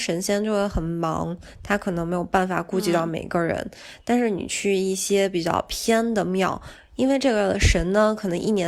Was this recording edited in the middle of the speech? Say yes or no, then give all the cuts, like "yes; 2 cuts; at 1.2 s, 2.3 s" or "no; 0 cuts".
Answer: no; 0 cuts